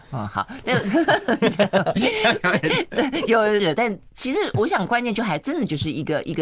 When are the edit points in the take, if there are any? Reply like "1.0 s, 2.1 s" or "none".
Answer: 3.6 s